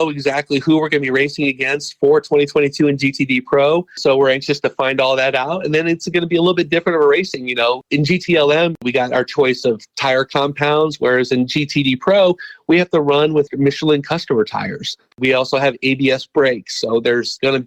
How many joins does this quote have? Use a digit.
0